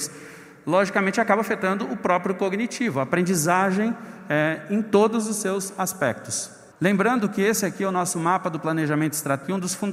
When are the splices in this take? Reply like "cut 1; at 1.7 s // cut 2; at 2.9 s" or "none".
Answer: cut 1; at 6.7 s

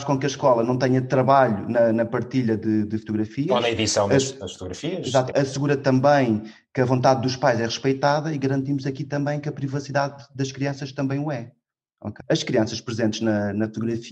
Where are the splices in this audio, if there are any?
cut 1; at 5.3 s // cut 2; at 12.2 s

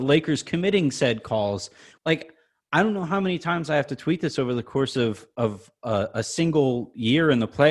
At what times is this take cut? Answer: cut 1; at 2.0 s

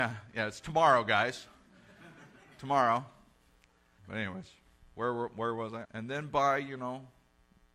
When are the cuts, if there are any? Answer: cut 1; at 4.0 s // cut 2; at 5.8 s

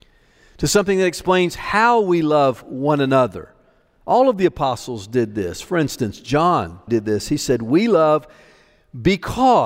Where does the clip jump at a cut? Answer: cut 1; at 6.9 s

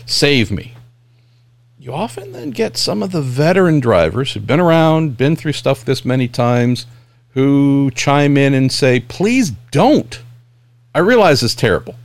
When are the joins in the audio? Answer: cut 1; at 5.8 s

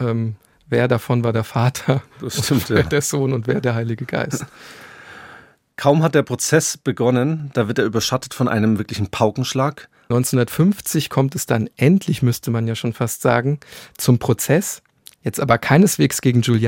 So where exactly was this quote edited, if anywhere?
cut 1; at 10.1 s

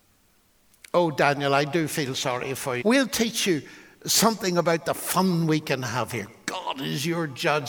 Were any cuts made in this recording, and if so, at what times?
cut 1; at 2.8 s

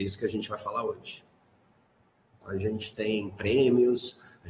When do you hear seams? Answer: cut 1; at 2.4 s

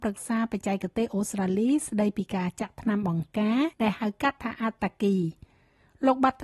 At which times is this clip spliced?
cut 1; at 3.7 s

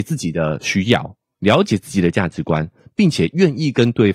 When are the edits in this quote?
none

